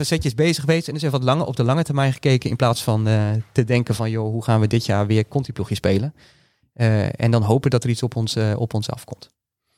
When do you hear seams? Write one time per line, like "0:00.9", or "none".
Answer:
none